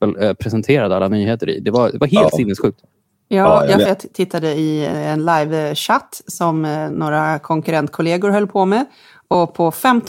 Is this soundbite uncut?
no; 1 cut; at 3.9 s

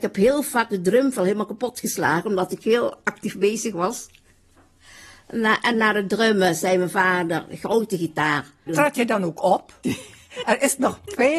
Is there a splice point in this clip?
yes; 2 cuts; at 8.7 s, 9.8 s

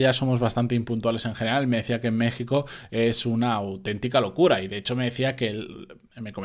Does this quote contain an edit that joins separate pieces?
no; 0 cuts

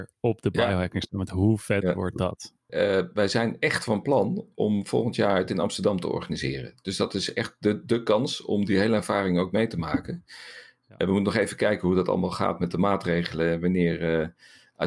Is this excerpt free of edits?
no; 1 cut; at 2.7 s

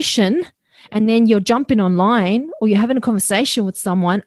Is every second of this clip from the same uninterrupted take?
yes; 0 cuts

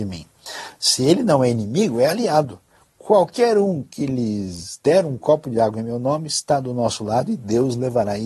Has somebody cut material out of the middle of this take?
no; 0 cuts

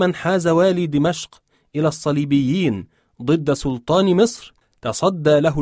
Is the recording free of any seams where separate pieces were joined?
yes; 0 cuts

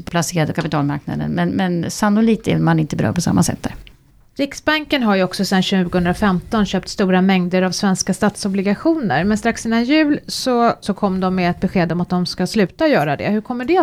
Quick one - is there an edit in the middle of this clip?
yes; 1 cut; at 10.8 s

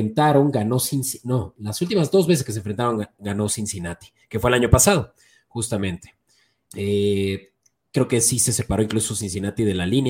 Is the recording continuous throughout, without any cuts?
no; 1 cut; at 6.7 s

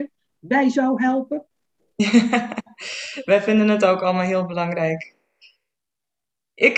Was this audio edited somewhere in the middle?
yes; 1 cut; at 1.9 s

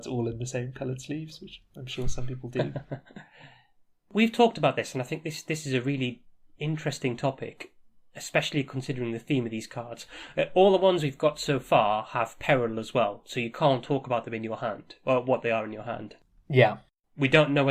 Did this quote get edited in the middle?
no; 0 cuts

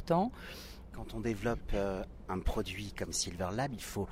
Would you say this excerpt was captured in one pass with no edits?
no; 1 cut; at 0.9 s

